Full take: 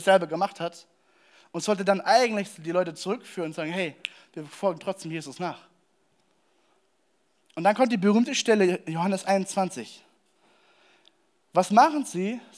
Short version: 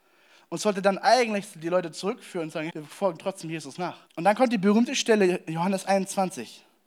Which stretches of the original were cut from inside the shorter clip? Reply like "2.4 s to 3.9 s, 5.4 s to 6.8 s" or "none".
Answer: 3.7 s to 4.3 s, 5.7 s to 7.5 s